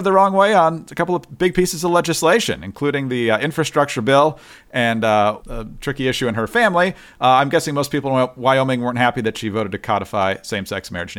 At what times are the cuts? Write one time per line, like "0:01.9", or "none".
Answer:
0:05.4